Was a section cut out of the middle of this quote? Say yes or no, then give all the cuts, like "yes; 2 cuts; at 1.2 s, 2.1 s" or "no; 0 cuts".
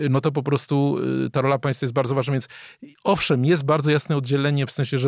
no; 0 cuts